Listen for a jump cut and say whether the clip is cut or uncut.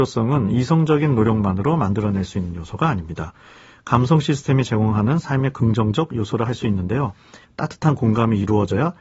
cut